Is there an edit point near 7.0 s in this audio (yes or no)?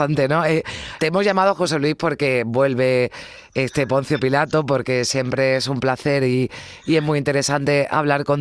no